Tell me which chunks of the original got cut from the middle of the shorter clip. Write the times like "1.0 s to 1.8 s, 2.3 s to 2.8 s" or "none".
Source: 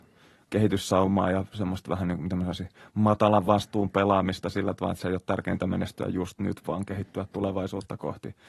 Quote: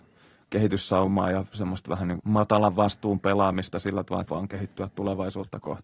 2.2 s to 2.9 s, 4.9 s to 6.6 s